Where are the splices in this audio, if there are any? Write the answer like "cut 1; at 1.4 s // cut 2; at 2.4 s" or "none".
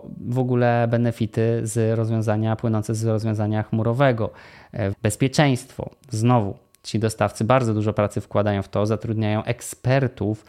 cut 1; at 4.9 s